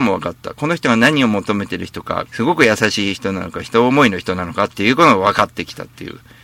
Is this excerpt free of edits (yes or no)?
no